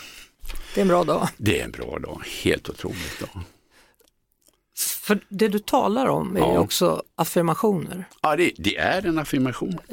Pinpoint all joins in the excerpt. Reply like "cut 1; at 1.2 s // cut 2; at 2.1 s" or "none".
none